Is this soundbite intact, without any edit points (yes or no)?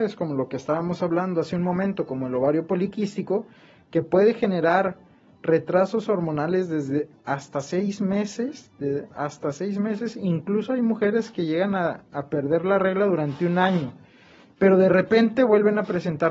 yes